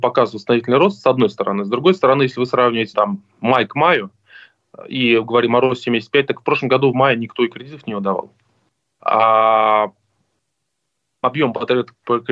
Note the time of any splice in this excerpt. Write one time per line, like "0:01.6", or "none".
0:02.9
0:09.0